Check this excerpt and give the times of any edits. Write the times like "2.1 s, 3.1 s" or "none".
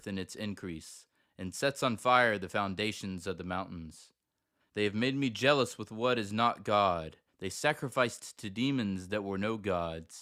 4.6 s, 7.3 s